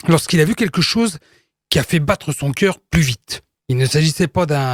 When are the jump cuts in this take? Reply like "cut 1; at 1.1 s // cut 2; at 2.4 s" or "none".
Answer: cut 1; at 3.6 s

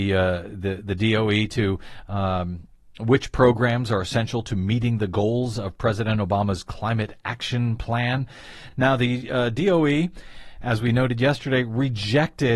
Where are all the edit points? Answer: none

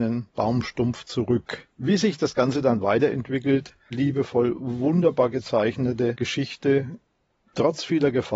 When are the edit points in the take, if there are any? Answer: cut 1; at 1.7 s // cut 2; at 3.9 s

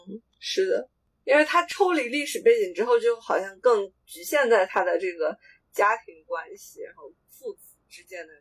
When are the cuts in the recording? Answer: none

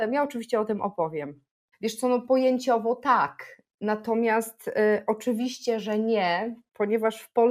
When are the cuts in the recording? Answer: cut 1; at 1.7 s

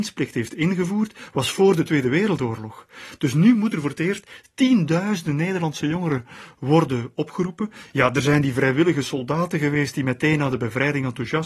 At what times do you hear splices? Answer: none

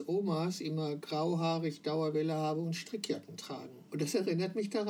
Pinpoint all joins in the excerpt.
cut 1; at 3.9 s

